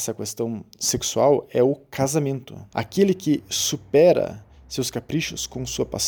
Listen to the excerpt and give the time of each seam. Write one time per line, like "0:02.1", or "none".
0:02.7